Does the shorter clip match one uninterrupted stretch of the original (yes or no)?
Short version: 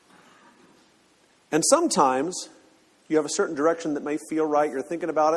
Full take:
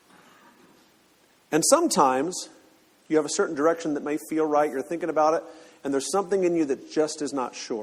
yes